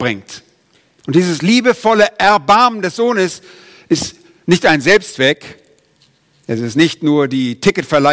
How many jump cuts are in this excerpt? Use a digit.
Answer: 1